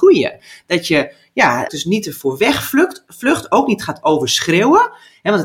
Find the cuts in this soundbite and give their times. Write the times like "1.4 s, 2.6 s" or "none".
1.7 s